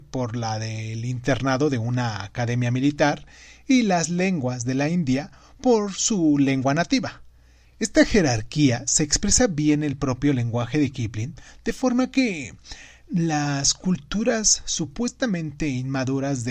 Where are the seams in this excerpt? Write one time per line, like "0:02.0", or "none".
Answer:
none